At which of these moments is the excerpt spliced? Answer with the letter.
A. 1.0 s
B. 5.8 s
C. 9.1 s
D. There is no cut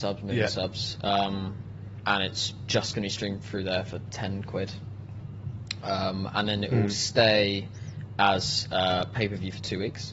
D